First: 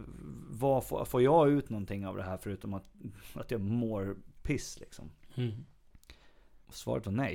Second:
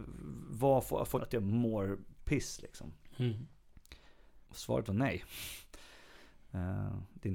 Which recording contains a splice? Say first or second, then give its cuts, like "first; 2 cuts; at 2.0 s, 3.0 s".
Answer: second; 1 cut; at 1.1 s